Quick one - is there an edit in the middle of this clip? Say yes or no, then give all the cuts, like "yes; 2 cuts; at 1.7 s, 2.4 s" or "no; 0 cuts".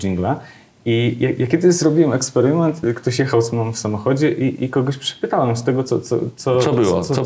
yes; 1 cut; at 2.8 s